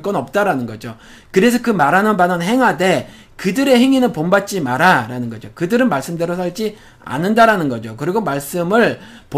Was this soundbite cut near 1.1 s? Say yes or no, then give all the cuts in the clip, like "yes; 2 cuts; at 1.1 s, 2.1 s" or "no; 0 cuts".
no; 0 cuts